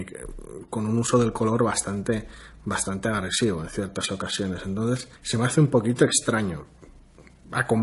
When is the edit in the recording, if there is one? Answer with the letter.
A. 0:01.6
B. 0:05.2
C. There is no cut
B